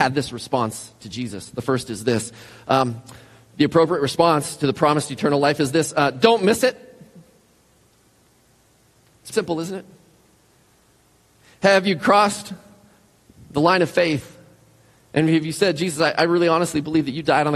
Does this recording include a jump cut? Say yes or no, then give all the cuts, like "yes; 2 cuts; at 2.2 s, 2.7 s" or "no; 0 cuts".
yes; 1 cut; at 9.3 s